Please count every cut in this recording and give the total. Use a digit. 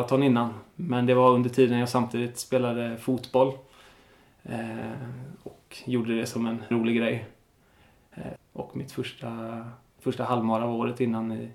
2